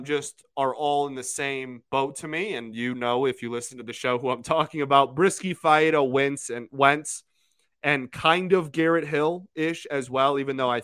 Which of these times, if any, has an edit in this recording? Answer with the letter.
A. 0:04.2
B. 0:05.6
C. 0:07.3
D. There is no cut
D